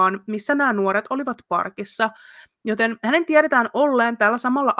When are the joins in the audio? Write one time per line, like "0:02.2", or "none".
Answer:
none